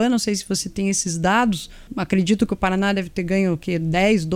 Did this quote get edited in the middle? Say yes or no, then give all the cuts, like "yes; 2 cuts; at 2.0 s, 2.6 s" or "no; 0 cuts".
yes; 1 cut; at 1.9 s